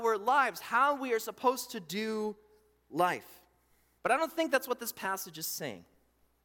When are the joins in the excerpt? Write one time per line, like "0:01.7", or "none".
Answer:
0:04.0